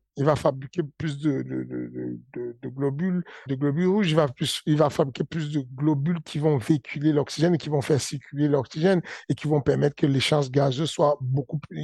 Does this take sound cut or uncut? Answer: cut